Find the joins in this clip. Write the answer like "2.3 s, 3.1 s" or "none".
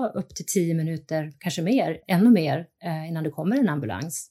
2.0 s